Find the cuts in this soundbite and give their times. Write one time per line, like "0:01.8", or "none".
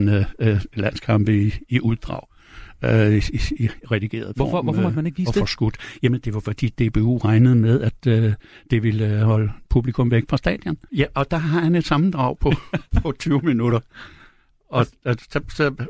0:10.9